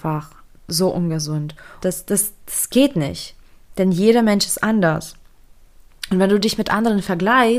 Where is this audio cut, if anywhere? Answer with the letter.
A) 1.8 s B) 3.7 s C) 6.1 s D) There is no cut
A